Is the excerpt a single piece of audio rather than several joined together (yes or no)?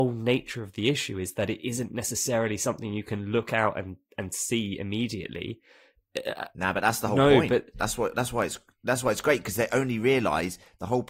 yes